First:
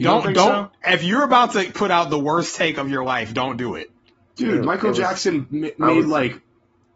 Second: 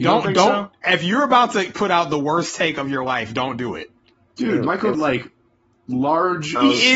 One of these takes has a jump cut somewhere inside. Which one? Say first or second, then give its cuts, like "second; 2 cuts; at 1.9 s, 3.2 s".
second; 1 cut; at 4.9 s